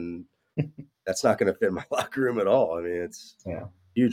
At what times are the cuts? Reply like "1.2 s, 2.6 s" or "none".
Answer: none